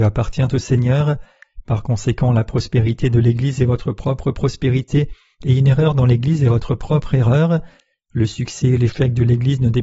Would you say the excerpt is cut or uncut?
uncut